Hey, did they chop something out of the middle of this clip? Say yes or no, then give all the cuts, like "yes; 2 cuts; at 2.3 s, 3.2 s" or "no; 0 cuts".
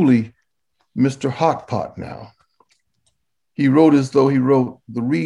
no; 0 cuts